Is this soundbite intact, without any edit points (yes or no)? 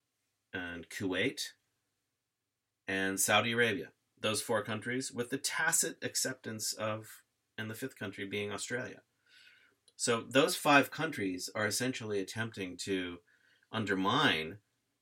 yes